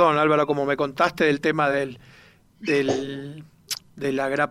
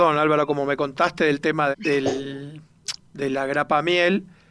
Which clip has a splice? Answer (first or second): second